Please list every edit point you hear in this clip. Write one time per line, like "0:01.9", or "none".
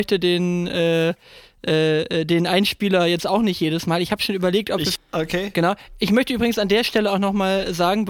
0:05.0